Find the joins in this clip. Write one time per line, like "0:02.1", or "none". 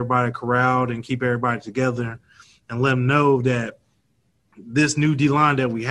none